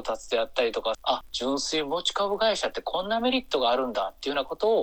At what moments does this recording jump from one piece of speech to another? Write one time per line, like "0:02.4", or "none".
0:00.9